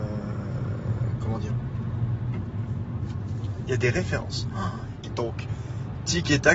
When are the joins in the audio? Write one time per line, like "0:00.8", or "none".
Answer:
0:03.6
0:05.0

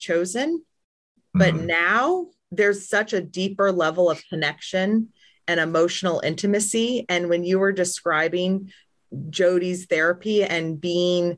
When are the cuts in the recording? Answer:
none

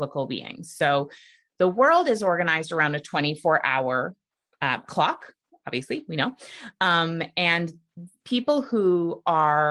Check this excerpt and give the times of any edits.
none

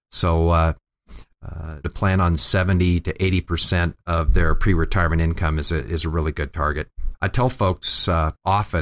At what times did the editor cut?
0:01.8
0:07.1

